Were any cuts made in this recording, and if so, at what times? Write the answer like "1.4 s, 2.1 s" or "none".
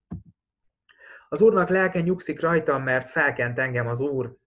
none